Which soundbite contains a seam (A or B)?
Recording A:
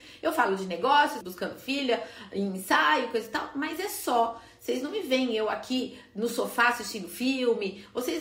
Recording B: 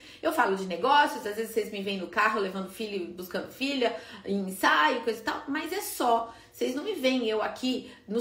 A